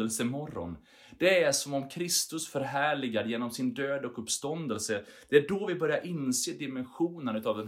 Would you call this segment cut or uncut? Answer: uncut